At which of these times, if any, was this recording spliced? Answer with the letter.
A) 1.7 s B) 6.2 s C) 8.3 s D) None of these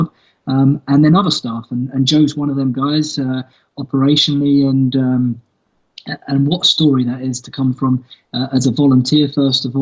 D